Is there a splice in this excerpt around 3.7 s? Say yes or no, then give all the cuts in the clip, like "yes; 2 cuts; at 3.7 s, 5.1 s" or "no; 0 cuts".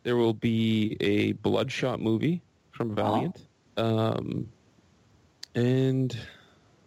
yes; 1 cut; at 3.7 s